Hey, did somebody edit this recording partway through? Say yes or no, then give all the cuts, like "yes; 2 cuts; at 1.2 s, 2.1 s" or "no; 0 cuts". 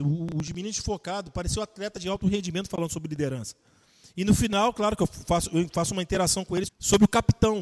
yes; 1 cut; at 6.7 s